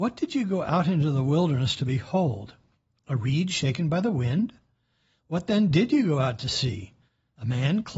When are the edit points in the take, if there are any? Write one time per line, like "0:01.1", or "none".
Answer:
none